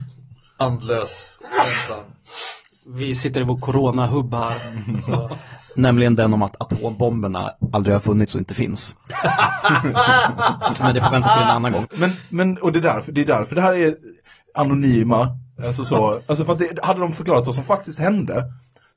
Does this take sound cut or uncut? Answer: cut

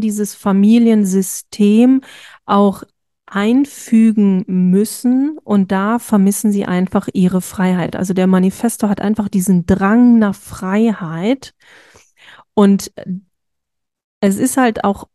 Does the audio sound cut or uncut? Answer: uncut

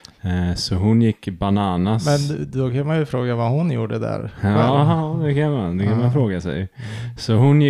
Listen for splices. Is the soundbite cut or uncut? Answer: uncut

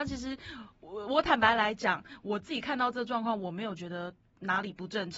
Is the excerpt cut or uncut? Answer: uncut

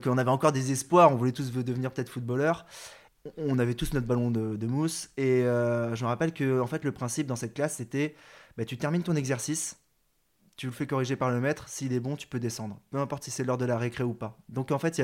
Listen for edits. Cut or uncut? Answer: uncut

